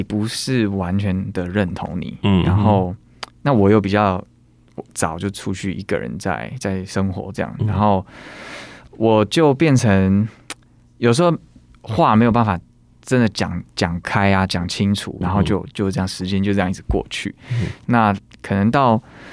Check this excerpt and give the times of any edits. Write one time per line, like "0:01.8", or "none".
0:15.2

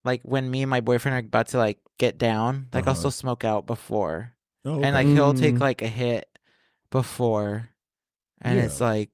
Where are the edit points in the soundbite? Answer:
none

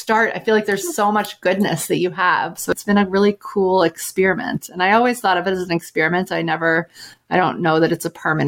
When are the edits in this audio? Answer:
0:02.6

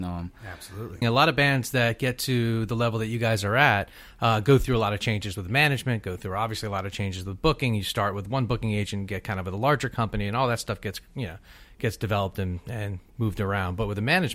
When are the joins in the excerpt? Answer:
0:01.0

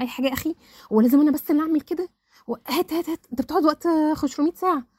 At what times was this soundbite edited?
none

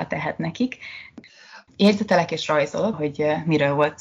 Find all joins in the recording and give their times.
0:01.7
0:02.9

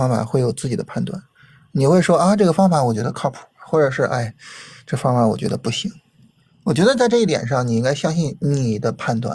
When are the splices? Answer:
none

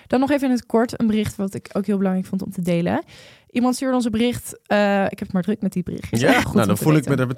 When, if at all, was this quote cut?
0:06.4

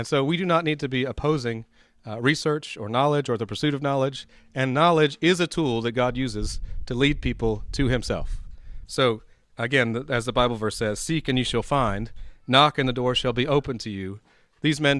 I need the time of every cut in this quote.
0:08.9

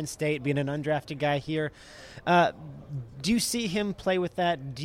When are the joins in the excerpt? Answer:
none

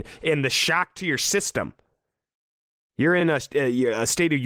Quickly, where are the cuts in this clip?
none

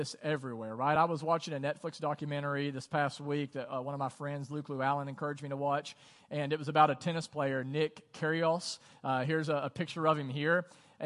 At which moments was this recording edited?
none

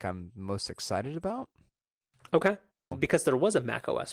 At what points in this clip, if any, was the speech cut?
0:02.9

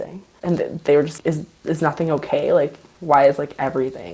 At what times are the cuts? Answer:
0:01.2

